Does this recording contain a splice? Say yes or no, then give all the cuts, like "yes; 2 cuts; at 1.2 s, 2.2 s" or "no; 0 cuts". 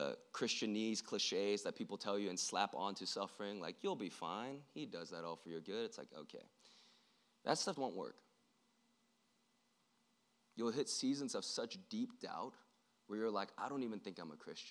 yes; 1 cut; at 7.8 s